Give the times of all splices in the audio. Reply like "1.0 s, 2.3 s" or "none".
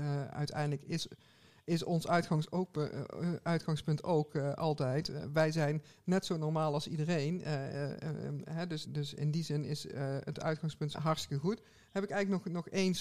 8.8 s, 10.9 s